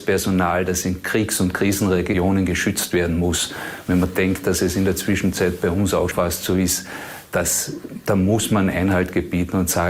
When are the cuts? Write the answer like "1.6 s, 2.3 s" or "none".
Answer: 6.1 s

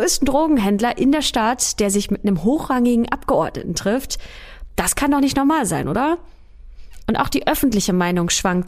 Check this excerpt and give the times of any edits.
7.0 s

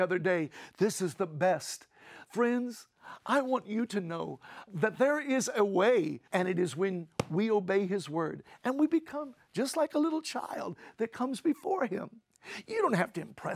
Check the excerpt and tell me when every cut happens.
2.2 s, 4.7 s, 6.3 s

